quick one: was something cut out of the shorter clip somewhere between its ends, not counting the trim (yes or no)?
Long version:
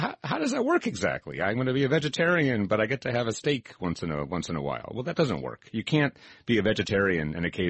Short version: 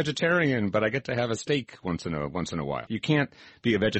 yes